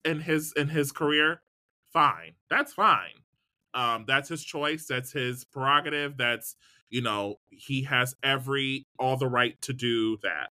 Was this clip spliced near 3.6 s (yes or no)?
no